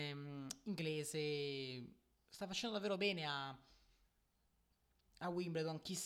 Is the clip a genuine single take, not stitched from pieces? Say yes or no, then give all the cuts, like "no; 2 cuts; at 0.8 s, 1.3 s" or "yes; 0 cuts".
yes; 0 cuts